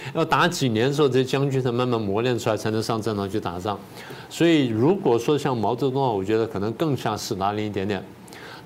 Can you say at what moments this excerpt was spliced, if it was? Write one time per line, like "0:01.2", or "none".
none